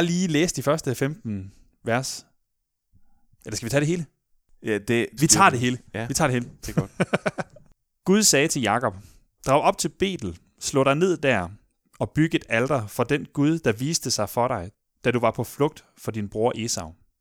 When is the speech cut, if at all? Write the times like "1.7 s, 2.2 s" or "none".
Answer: 5.2 s